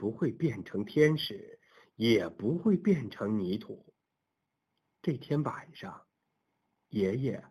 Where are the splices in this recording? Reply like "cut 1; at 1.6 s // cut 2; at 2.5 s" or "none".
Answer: none